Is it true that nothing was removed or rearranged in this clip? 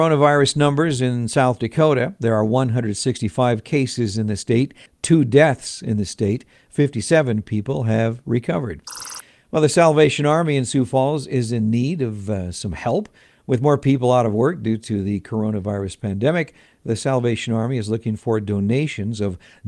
no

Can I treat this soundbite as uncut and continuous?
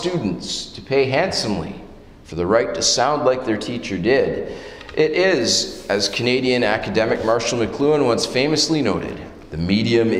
yes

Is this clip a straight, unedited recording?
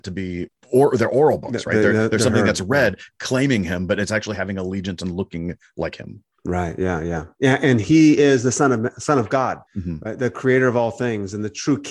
no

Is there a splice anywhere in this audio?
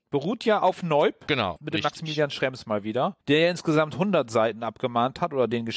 yes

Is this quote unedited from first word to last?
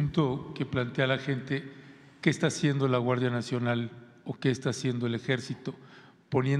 yes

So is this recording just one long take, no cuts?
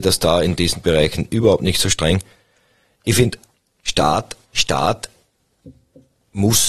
no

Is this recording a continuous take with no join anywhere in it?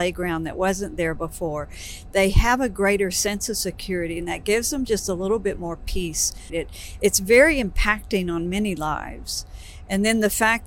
no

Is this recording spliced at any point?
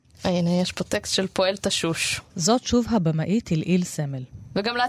no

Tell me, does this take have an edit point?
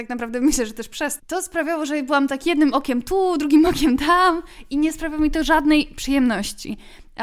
yes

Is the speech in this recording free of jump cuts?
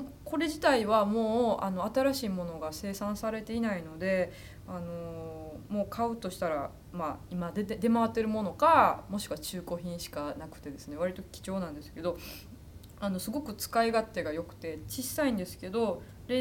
yes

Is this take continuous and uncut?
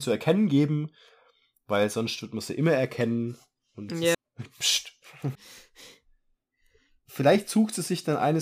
no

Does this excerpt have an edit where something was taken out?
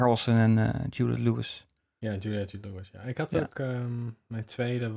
no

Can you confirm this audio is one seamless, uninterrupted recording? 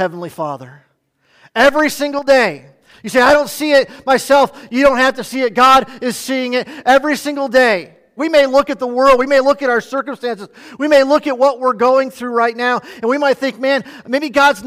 no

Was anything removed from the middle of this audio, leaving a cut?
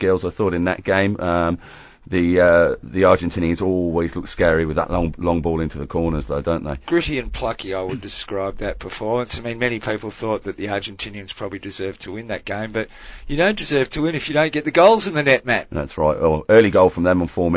no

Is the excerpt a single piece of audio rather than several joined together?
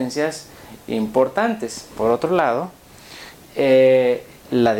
no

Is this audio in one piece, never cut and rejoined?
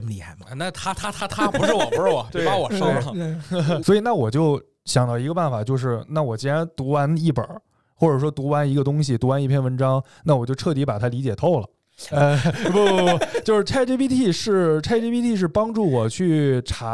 no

